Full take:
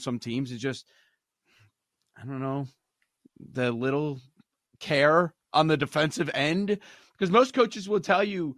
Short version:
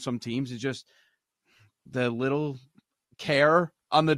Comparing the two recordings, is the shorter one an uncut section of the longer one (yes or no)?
no